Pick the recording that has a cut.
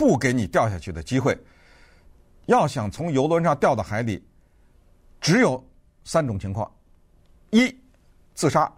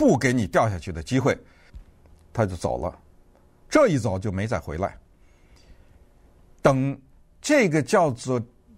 second; 1 cut; at 1.7 s

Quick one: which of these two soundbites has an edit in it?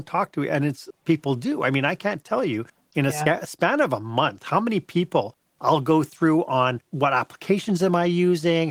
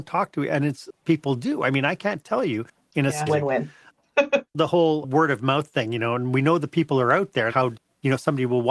second; 2 cuts; at 3.3 s, 7.5 s

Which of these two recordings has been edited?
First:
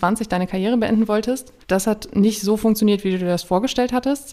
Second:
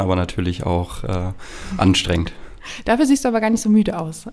first; 1 cut; at 1.6 s

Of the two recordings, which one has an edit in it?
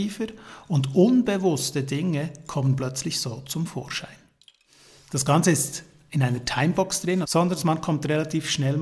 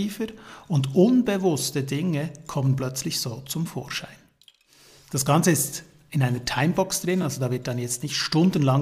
first; 1 cut; at 7.2 s

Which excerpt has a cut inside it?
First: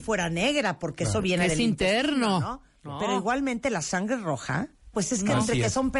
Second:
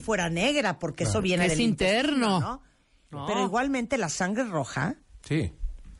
first; 2 cuts; at 2.8 s, 4.9 s

